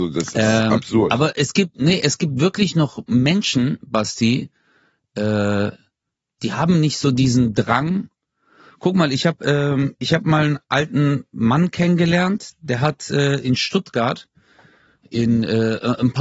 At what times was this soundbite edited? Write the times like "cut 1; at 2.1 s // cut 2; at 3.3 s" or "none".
none